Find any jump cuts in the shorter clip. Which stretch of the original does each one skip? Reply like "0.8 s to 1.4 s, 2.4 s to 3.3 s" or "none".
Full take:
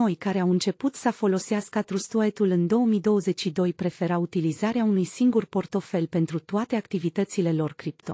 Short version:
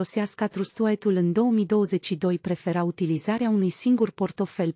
none

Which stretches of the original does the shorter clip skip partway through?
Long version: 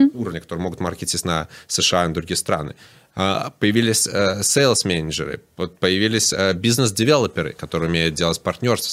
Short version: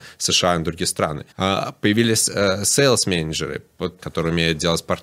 2.8 s to 3.1 s, 5.8 s to 7.6 s

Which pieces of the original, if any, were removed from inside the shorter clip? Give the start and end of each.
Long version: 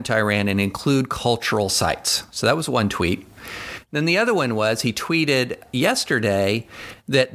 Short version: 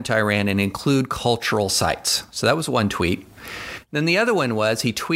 none

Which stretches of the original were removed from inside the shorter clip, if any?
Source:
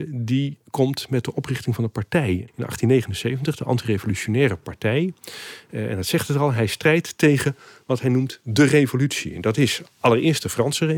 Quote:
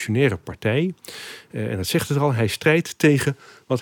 none

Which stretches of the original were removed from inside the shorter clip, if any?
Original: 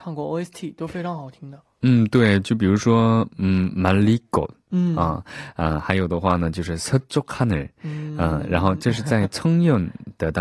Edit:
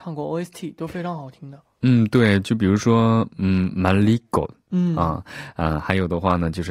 none

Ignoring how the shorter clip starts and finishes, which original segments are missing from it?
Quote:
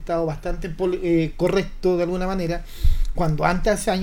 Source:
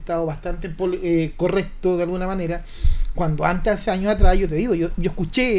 none

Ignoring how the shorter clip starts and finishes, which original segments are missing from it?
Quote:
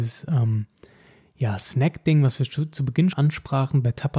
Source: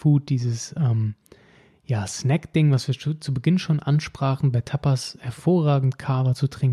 3.6 s to 3.8 s

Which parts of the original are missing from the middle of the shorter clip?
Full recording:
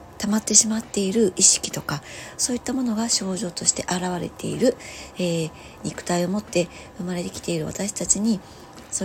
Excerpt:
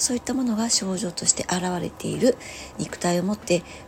5.1 s to 5.8 s

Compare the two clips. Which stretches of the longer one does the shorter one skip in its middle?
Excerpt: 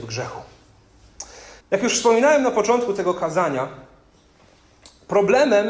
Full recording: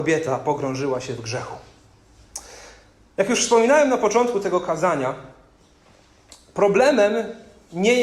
2.8 s to 3.1 s

